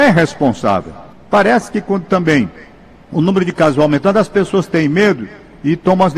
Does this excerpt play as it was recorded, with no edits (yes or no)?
no